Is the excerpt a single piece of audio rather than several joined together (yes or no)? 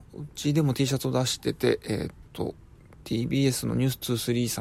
no